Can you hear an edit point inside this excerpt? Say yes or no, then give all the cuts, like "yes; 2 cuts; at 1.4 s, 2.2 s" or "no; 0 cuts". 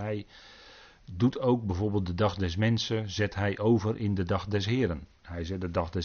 no; 0 cuts